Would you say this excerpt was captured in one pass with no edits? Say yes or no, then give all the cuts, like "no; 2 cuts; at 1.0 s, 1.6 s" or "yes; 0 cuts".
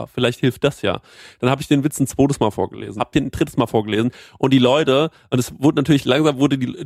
no; 1 cut; at 3.0 s